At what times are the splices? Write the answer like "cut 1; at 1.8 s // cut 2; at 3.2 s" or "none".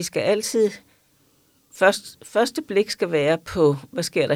none